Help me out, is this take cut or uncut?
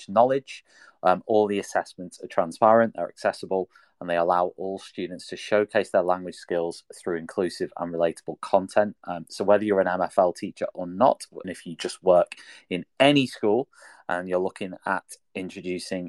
cut